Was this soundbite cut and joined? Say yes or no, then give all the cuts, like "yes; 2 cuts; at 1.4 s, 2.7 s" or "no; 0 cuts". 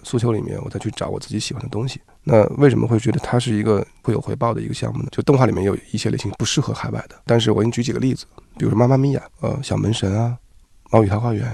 yes; 2 cuts; at 5.1 s, 9.3 s